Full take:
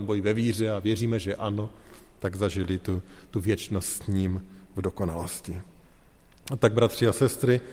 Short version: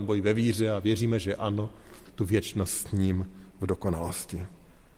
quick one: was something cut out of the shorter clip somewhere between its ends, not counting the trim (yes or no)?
yes